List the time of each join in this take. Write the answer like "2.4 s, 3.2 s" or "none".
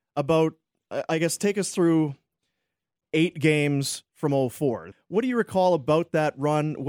4.9 s

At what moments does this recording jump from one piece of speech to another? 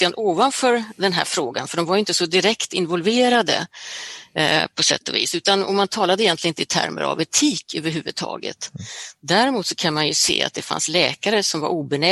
none

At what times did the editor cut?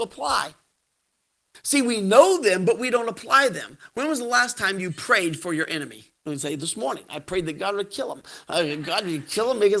6.2 s

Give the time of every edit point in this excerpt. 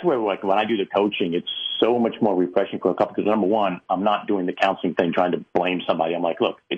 none

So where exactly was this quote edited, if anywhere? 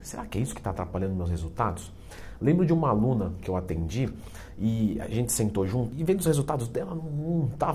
5.9 s

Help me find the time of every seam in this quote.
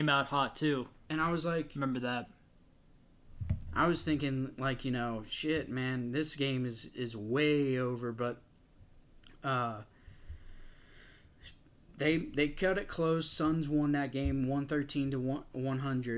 3.7 s

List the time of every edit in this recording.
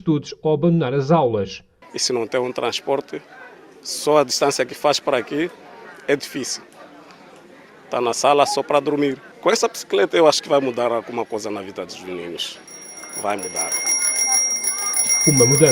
1.8 s

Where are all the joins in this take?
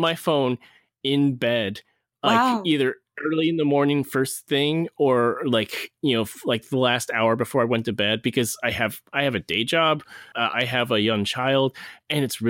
10.3 s

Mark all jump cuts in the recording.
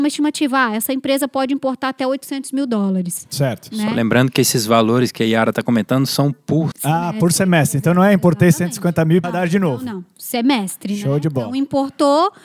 6.7 s, 9.2 s

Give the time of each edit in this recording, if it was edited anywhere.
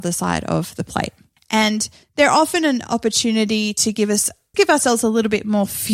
1.4 s, 4.5 s

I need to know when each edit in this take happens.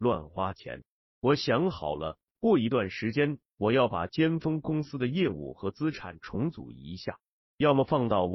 none

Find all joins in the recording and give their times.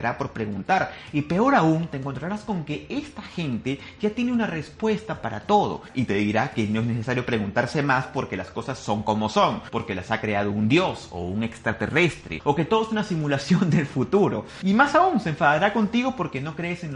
none

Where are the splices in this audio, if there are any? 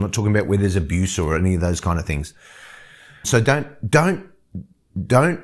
3.2 s

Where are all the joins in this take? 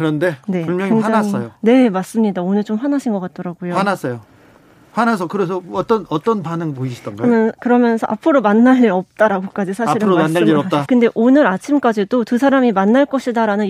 10.9 s

